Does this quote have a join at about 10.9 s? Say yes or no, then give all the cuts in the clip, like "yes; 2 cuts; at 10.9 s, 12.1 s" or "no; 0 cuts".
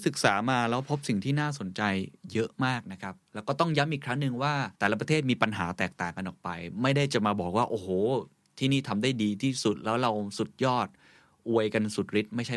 no; 1 cut; at 4.7 s